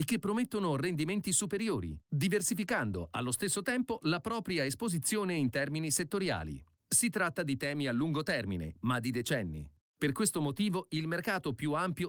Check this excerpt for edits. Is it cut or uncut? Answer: cut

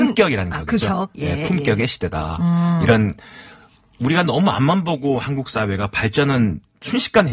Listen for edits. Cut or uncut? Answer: uncut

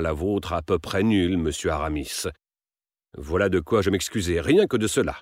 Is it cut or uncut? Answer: uncut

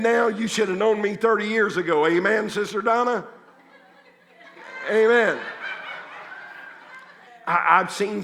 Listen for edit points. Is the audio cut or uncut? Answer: cut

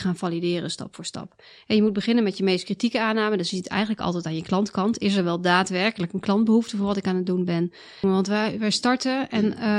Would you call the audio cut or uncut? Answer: cut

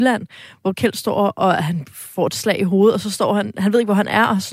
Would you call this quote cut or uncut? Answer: uncut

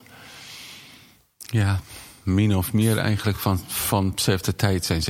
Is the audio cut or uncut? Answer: uncut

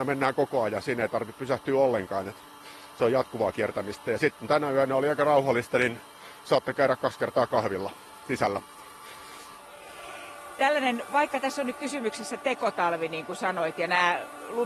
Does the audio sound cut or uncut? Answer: uncut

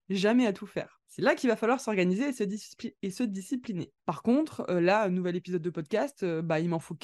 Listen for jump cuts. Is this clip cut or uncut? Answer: cut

